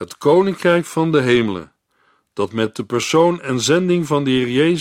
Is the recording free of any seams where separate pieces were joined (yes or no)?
yes